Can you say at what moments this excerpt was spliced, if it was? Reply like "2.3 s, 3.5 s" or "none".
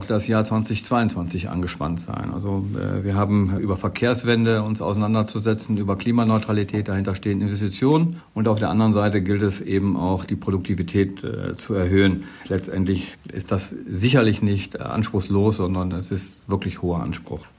3.6 s